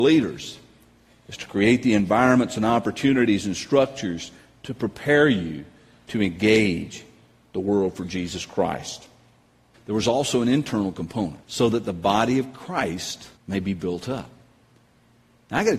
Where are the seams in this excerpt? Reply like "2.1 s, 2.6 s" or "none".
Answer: 9.7 s, 11.4 s, 13.4 s